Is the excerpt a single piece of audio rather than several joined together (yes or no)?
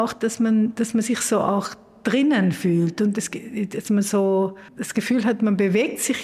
no